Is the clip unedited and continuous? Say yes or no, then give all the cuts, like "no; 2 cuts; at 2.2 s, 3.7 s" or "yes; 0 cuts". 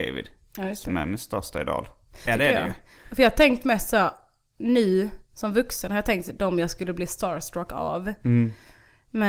no; 1 cut; at 2.3 s